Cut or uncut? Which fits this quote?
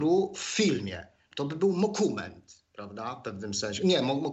cut